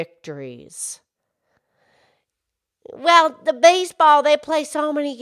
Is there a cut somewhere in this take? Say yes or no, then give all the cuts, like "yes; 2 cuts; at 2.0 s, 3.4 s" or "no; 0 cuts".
no; 0 cuts